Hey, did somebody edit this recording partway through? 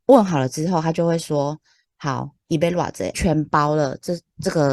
yes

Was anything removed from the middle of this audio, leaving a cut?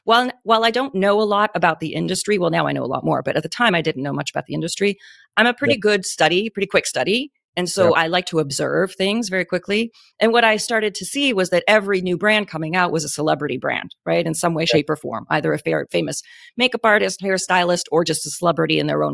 no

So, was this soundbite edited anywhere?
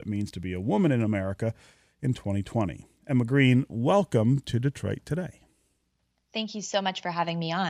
no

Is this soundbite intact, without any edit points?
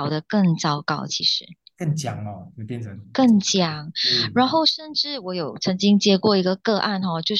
yes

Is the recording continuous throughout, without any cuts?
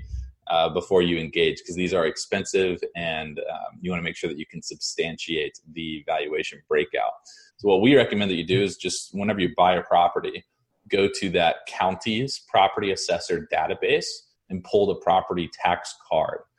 no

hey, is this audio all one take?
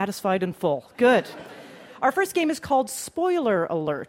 yes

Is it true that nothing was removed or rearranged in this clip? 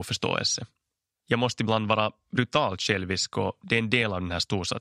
no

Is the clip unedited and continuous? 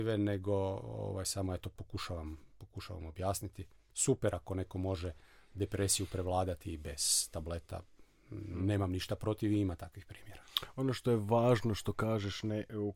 yes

